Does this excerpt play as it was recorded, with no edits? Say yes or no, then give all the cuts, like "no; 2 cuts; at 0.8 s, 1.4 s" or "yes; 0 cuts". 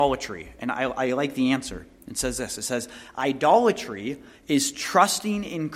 yes; 0 cuts